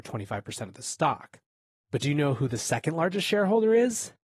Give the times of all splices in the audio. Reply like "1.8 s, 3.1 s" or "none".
none